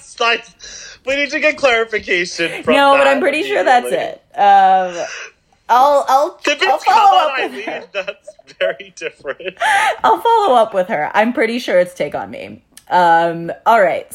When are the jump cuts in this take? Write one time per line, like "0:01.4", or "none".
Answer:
none